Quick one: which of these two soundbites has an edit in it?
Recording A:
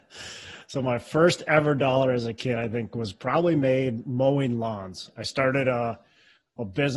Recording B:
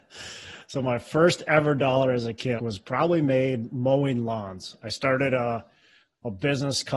B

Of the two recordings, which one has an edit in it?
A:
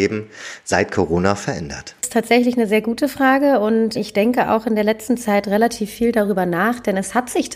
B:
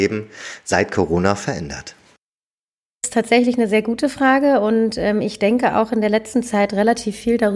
A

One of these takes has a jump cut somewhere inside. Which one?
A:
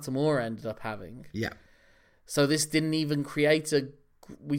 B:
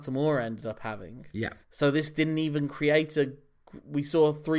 B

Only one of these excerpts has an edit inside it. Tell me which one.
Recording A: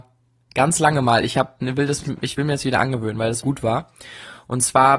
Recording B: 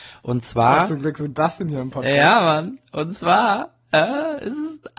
A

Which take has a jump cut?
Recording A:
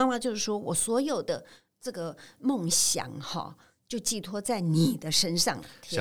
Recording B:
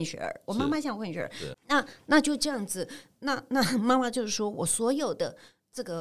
B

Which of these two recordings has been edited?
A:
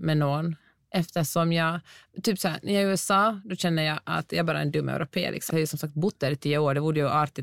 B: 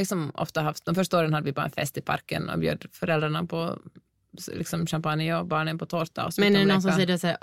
A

